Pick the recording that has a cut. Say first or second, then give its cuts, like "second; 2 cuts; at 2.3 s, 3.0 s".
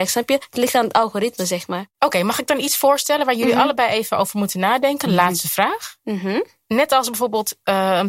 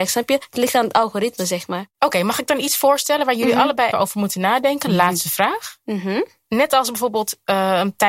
second; 1 cut; at 3.9 s